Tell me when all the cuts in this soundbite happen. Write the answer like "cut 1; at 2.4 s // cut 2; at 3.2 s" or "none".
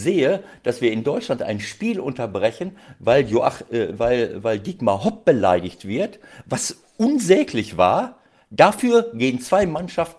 none